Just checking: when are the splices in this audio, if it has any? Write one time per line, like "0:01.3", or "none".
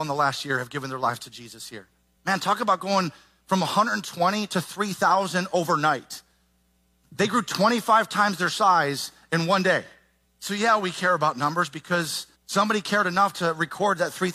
0:02.2
0:10.2
0:12.3